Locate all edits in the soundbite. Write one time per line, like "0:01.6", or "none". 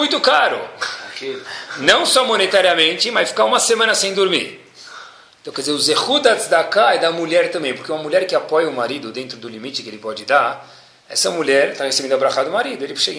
none

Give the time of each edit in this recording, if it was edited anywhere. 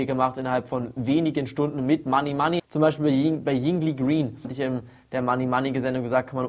0:02.6
0:04.4

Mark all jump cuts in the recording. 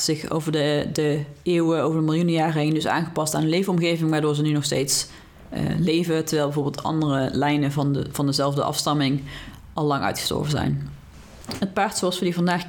none

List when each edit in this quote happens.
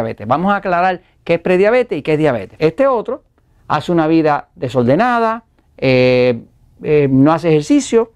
0:02.6

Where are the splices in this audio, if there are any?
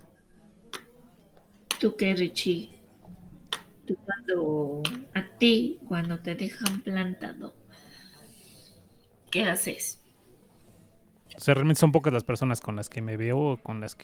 0:05.1
0:11.3

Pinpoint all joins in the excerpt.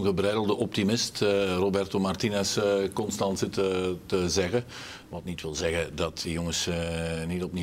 none

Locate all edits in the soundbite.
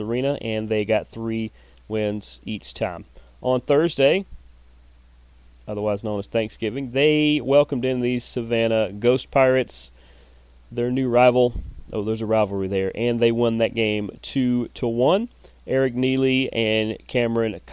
none

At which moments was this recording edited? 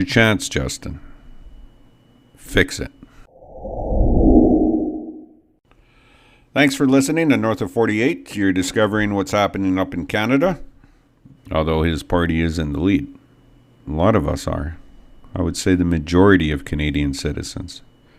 0:11.4
0:13.8

